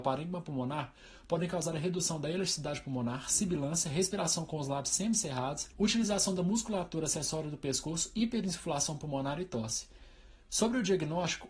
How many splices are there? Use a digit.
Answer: 1